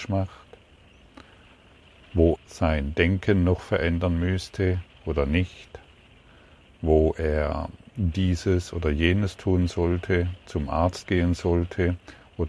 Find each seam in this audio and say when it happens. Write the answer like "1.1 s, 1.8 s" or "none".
2.4 s